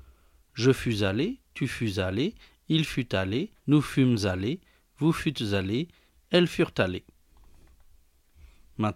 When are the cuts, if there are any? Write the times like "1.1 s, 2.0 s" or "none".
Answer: 3.6 s, 6.1 s